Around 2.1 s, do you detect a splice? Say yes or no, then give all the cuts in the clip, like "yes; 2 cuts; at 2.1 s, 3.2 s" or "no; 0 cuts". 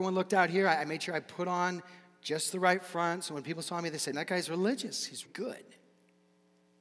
no; 2 cuts; at 4.1 s, 5.2 s